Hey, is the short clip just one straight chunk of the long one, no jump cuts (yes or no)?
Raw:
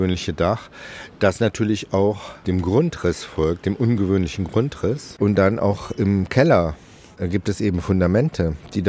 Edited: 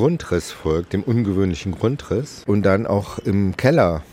yes